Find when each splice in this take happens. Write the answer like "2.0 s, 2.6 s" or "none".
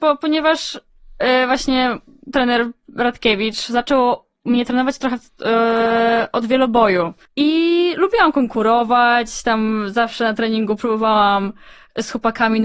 7.2 s